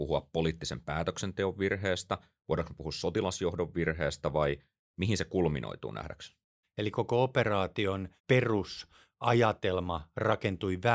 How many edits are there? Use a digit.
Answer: 2